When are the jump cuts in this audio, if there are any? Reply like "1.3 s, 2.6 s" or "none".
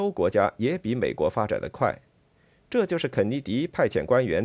none

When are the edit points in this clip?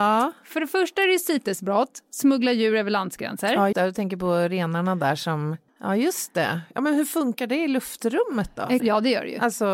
3.7 s, 5.7 s, 8.8 s

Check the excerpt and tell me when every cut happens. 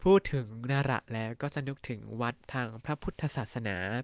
2.4 s

